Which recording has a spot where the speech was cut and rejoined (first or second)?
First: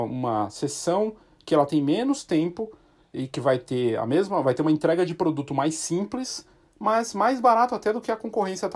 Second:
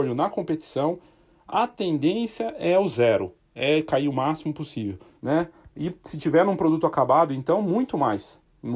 second